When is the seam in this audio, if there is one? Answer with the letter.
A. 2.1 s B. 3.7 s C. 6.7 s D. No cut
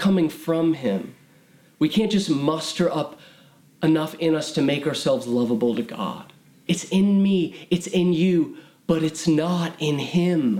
C